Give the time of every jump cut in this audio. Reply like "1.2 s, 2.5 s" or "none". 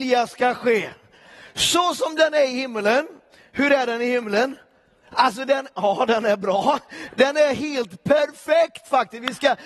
none